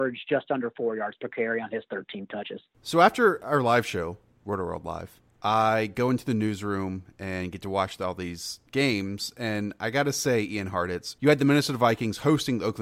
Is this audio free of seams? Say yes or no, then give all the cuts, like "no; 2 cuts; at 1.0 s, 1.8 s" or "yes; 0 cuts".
yes; 0 cuts